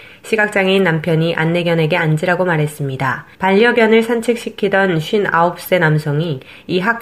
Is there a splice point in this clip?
yes; 1 cut; at 3.3 s

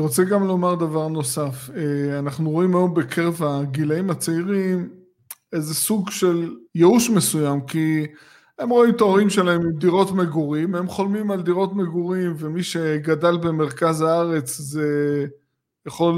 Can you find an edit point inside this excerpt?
yes; 1 cut; at 6.7 s

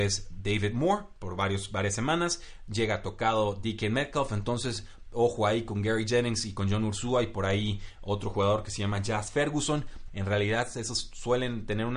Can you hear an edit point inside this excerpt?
yes; 1 cut; at 10.1 s

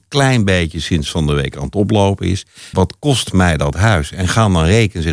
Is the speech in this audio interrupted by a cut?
yes; 1 cut; at 2.7 s

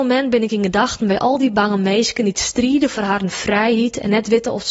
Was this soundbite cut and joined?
no; 0 cuts

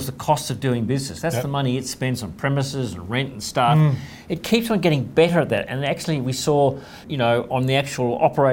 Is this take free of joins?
no; 1 cut; at 7.0 s

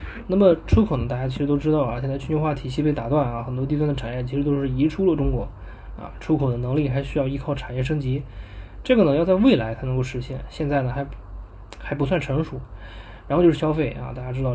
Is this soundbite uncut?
yes; 0 cuts

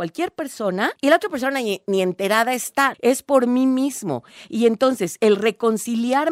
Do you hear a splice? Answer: yes; 2 cuts; at 1.0 s, 2.9 s

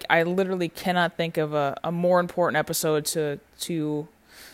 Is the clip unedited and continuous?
no; 1 cut; at 1.8 s

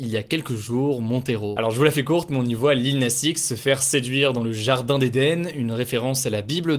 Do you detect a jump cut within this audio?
no; 0 cuts

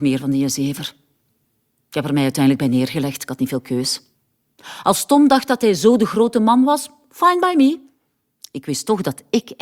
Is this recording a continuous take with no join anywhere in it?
yes; 0 cuts

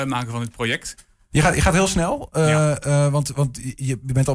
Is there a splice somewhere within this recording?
yes; 1 cut; at 1.3 s

